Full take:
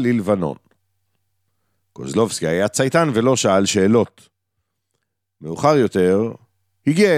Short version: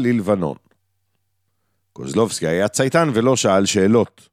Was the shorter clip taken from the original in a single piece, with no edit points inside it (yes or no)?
yes